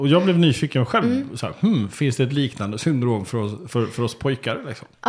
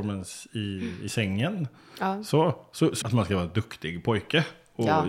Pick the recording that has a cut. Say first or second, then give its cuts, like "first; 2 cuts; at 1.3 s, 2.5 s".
second; 1 cut; at 3.0 s